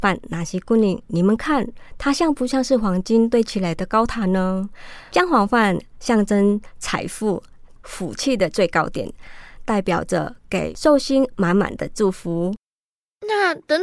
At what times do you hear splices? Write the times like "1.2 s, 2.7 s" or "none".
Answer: 7.8 s, 9.6 s